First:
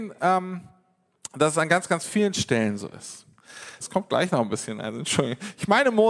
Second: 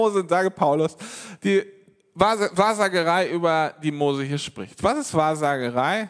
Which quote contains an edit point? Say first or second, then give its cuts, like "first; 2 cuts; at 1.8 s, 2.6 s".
first; 1 cut; at 3.8 s